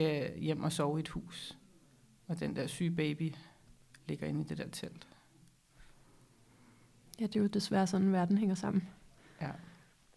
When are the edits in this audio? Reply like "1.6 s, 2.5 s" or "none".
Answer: none